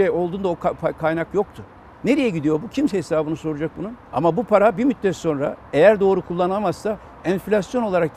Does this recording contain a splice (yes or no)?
yes